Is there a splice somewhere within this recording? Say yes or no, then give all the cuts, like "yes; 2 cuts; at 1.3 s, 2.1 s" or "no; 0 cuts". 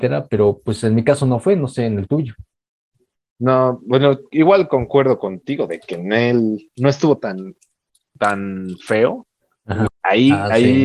yes; 1 cut; at 9.9 s